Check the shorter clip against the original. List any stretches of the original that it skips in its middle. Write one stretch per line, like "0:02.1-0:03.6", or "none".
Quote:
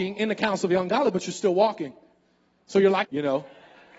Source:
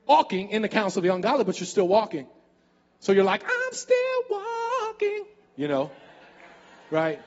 0:03.4-0:05.5